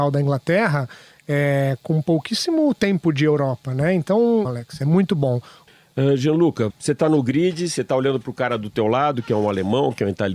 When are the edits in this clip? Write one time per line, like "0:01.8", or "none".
0:04.4
0:06.7